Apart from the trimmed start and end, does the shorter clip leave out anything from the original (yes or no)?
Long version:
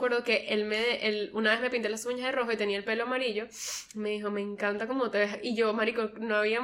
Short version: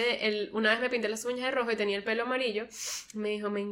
no